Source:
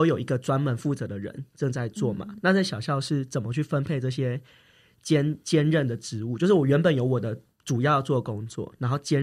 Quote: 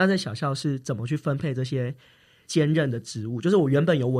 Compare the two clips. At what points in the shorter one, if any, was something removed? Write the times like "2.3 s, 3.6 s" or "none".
2.5 s